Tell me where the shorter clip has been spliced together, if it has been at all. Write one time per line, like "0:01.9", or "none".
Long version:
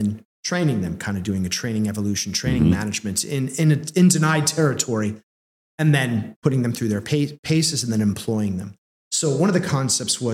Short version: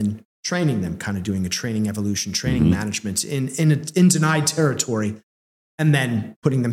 none